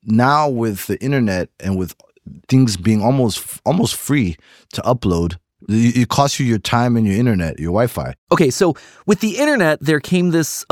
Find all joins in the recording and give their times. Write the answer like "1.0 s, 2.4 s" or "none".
8.2 s